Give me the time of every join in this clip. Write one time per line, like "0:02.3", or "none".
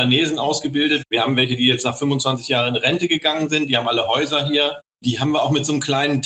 none